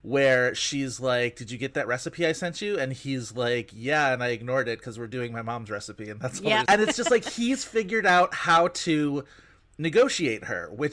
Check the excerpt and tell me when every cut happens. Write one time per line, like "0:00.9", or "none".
0:06.7